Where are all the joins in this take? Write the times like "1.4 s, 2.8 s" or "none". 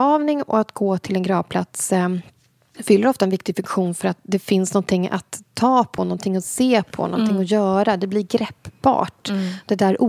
none

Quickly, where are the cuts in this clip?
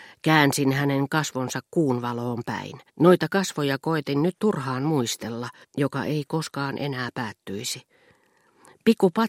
2.9 s, 5.6 s

